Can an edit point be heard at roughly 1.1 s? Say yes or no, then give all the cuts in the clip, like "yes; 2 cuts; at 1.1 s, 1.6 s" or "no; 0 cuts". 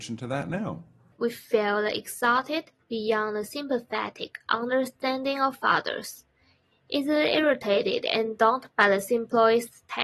no; 1 cut; at 2.8 s